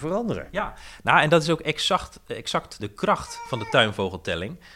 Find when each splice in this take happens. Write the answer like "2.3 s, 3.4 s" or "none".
2.8 s